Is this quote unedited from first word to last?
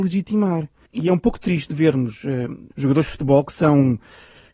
no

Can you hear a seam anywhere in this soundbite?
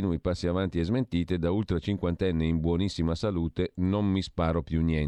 no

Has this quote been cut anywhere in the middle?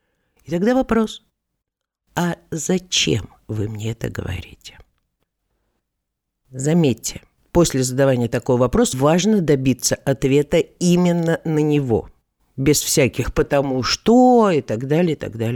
yes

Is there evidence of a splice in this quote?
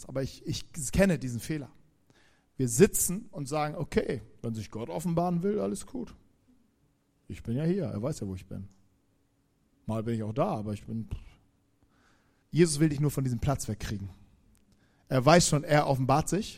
yes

